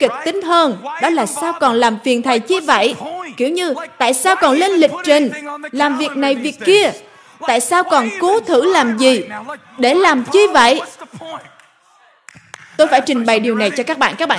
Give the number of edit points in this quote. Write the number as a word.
zero